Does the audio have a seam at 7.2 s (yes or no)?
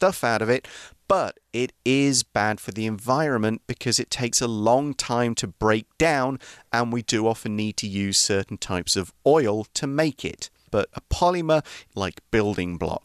no